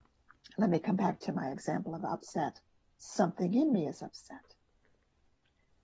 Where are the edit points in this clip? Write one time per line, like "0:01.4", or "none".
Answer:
0:02.8

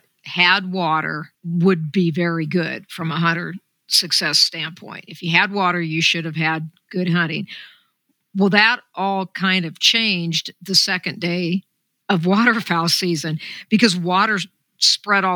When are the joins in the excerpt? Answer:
0:01.3

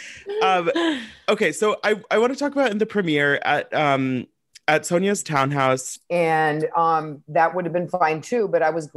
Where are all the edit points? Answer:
0:06.0

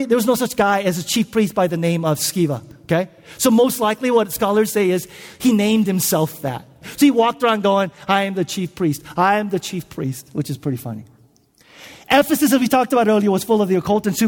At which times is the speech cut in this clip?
0:06.8

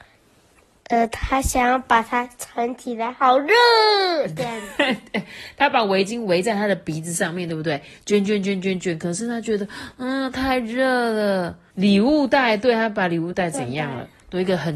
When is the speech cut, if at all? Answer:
0:11.7

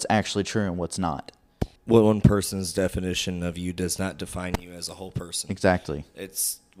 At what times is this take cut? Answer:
0:01.8

